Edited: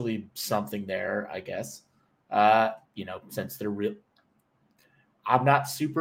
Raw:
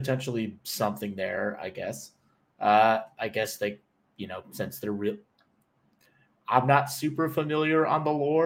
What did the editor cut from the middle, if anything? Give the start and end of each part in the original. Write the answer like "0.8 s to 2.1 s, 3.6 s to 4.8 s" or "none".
3.1 s to 4.1 s

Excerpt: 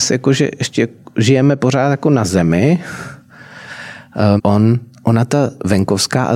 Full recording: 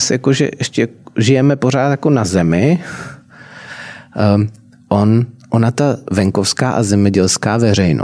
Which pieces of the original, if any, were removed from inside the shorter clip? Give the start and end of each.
4.4 s to 4.8 s

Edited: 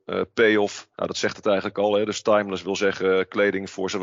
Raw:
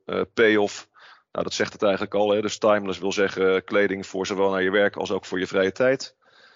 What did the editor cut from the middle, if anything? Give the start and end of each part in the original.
0.9 s to 1.3 s

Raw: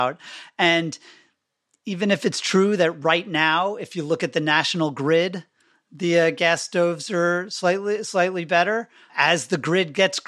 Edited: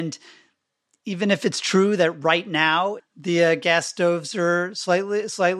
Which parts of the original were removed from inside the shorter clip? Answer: 3.8 s to 5.7 s

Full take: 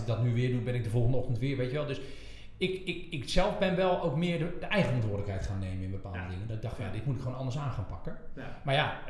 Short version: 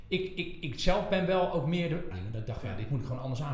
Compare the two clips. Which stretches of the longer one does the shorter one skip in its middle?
4.6 s to 6.3 s

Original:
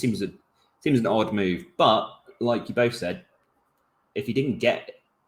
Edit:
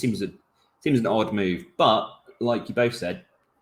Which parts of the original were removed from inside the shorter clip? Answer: none

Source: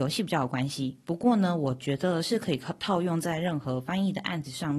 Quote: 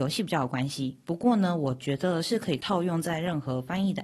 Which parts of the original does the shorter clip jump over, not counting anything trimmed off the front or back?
2.6 s to 2.8 s

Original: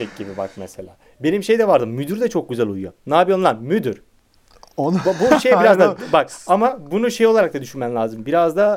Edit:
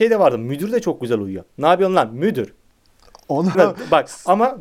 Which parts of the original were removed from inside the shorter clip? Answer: 5.0 s to 5.8 s

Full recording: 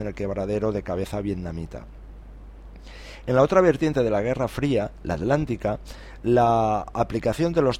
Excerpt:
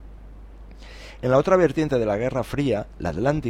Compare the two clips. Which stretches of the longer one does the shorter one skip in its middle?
none

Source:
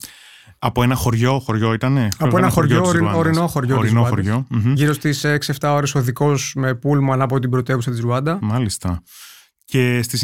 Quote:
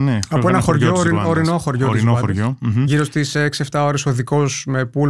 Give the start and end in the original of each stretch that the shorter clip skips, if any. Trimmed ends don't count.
none

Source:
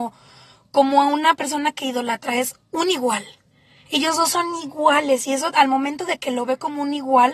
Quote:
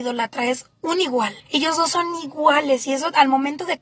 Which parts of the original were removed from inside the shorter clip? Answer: 3.3 s to 3.8 s

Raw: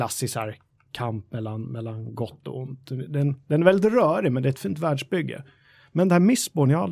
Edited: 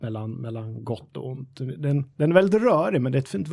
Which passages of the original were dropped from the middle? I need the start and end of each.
none

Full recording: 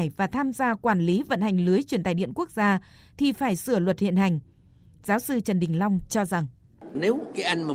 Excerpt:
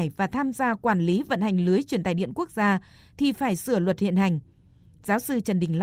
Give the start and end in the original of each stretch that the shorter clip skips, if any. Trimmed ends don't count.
none

